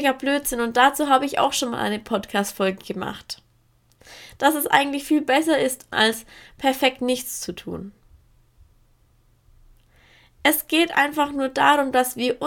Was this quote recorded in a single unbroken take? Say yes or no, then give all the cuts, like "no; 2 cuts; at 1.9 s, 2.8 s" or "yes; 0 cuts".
no; 1 cut; at 5.9 s